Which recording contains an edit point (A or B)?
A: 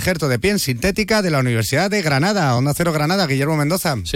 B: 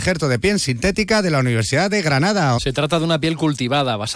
B